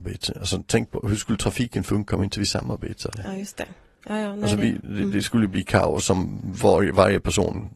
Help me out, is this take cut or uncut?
uncut